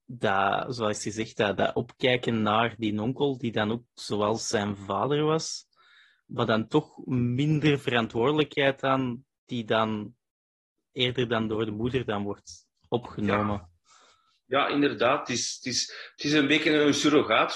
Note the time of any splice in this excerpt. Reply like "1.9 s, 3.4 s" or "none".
none

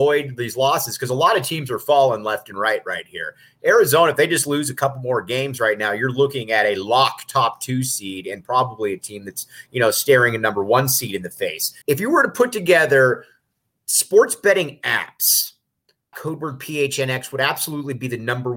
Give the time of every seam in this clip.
11.8 s, 16.1 s

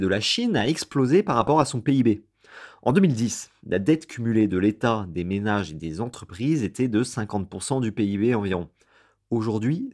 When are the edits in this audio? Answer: none

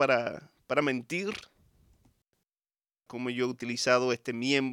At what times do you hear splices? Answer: 3.1 s

